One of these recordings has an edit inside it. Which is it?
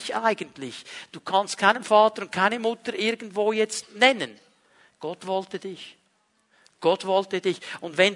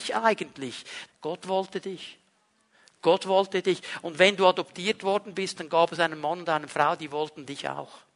second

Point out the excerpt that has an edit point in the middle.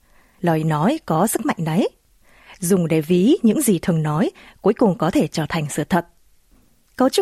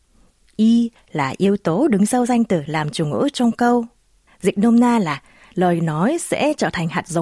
second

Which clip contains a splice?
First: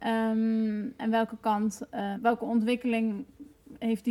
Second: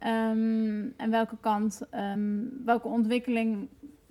first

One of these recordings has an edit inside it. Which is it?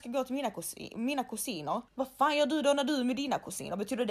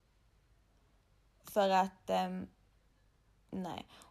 first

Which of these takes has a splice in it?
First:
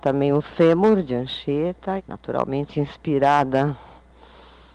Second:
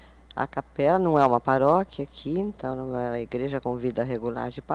first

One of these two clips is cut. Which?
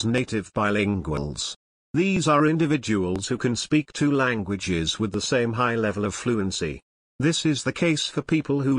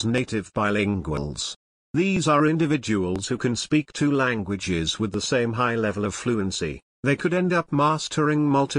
second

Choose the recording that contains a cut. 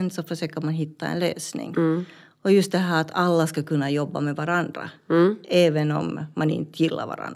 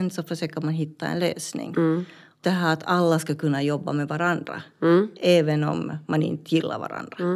second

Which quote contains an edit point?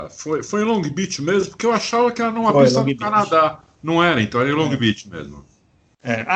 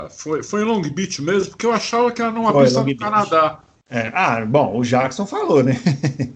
second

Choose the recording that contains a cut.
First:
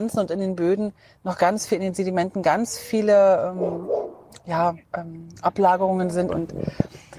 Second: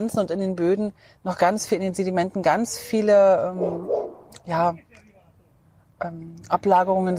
first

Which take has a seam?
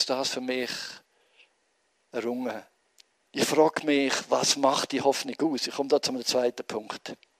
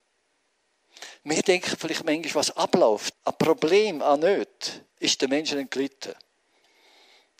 second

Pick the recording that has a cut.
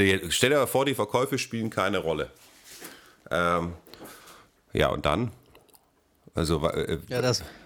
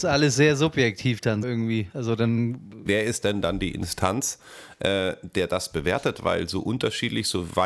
second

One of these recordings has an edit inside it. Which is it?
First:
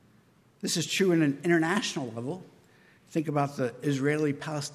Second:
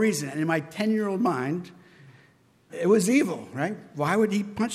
second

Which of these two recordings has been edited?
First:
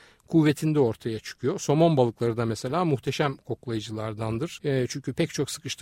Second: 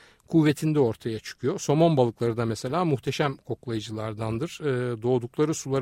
first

